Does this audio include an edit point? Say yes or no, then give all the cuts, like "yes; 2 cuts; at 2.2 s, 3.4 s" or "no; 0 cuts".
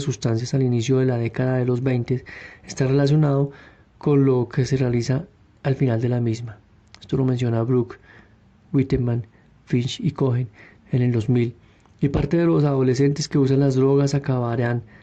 no; 0 cuts